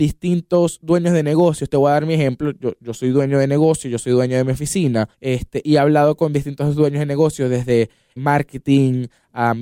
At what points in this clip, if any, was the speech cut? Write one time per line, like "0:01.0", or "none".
0:05.1
0:08.2